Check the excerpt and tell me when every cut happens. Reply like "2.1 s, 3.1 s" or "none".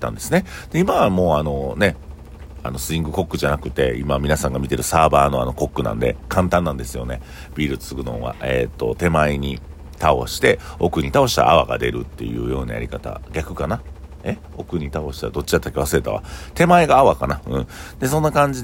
none